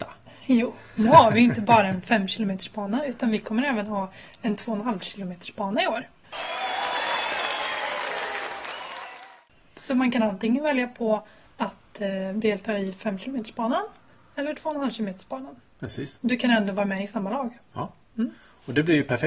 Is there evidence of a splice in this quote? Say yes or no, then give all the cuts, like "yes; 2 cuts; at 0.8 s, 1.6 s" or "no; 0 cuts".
no; 0 cuts